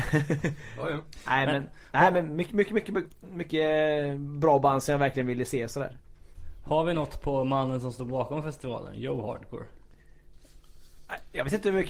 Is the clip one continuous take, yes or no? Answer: yes